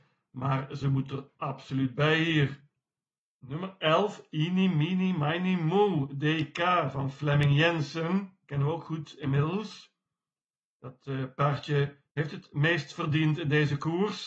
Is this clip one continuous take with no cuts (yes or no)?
yes